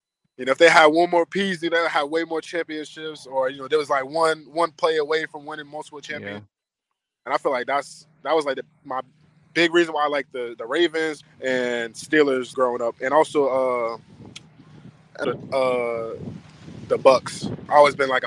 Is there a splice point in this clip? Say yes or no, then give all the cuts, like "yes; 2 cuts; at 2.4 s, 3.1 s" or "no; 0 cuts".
yes; 3 cuts; at 11.2 s, 12.5 s, 15.2 s